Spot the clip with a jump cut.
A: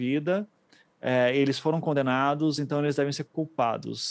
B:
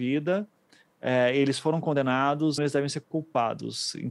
B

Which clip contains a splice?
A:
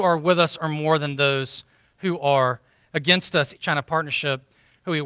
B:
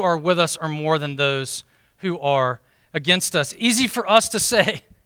A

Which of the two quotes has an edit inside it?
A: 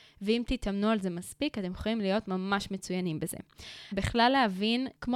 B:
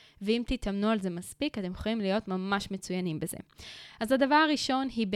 A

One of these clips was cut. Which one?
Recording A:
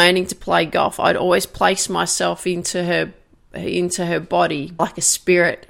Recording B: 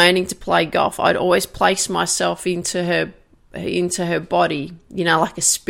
A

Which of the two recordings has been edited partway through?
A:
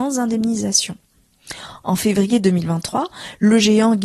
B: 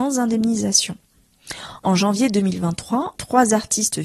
B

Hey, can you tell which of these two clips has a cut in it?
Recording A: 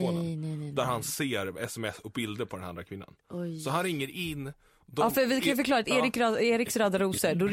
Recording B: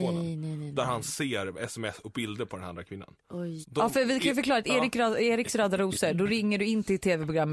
B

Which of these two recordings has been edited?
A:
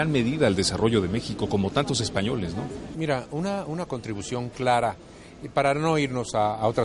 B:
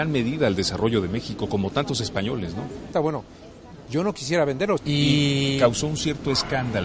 B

